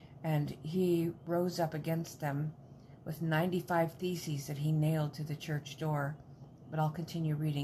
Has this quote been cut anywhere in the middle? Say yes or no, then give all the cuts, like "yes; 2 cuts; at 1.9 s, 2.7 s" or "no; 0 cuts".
no; 0 cuts